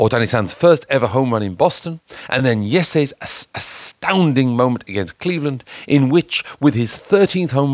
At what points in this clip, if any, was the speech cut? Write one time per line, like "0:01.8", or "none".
none